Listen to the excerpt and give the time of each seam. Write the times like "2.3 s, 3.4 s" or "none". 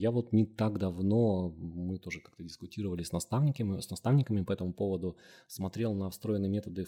none